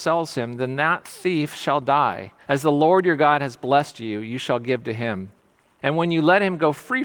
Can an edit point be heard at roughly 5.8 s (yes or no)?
yes